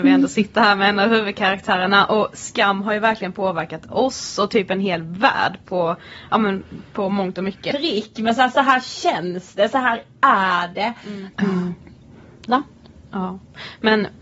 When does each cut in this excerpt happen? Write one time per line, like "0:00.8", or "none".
0:07.7
0:11.3
0:12.5

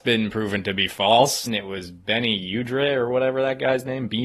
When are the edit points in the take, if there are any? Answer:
0:01.5

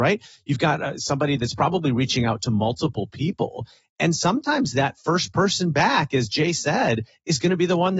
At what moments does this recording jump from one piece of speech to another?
none

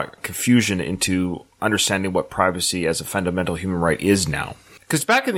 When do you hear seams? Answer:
none

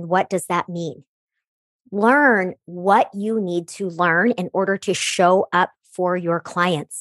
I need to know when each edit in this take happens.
none

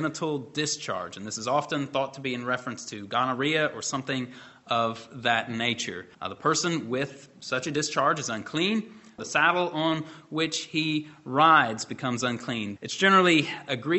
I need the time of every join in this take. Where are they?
0:06.1
0:09.2
0:12.8

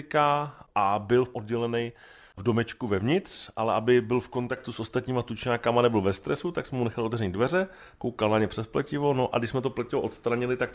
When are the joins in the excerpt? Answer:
none

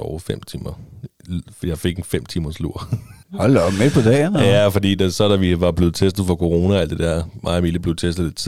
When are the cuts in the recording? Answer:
0:03.2

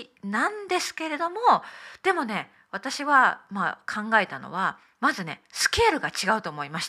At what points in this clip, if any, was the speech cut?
none

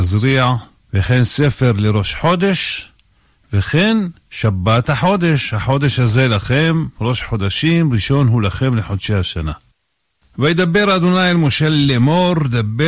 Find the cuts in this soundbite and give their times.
none

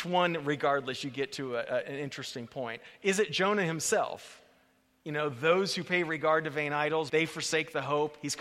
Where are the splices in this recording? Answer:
0:07.1

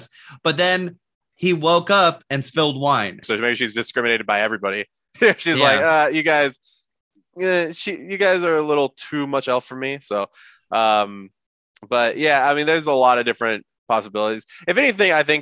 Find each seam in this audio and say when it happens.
0:03.2

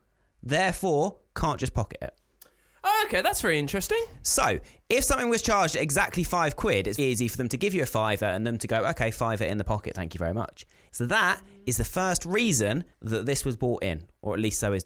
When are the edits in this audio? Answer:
0:07.0
0:10.9
0:12.9

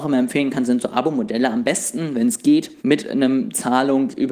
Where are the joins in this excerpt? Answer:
0:02.8

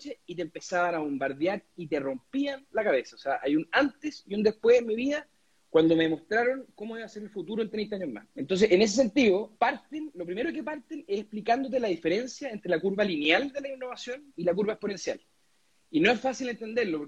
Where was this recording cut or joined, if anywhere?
0:08.3
0:09.6
0:14.3

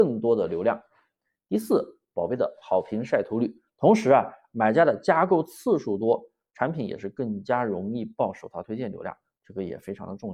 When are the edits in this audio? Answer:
0:03.7

